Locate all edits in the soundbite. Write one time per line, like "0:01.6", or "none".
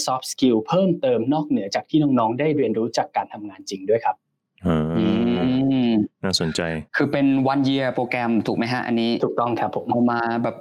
0:06.9